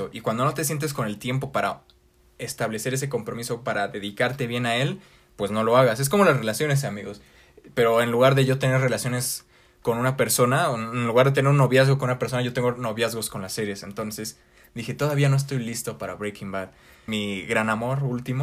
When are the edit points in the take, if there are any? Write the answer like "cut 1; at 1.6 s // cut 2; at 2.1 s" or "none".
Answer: cut 1; at 17.1 s